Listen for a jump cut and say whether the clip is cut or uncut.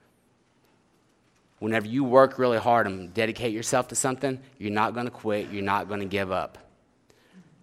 uncut